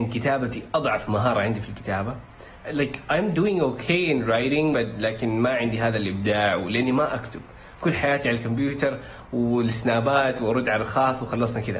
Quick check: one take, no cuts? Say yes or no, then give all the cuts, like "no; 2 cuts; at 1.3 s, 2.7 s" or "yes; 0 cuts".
no; 1 cut; at 2.6 s